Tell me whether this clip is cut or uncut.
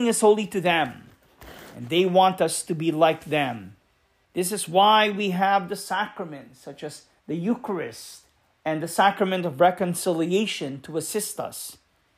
cut